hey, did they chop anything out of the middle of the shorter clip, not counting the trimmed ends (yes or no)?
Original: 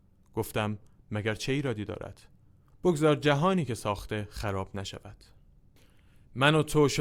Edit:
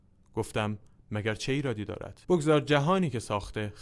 yes